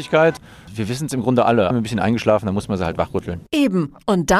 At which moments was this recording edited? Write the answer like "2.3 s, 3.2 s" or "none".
1.7 s, 3.5 s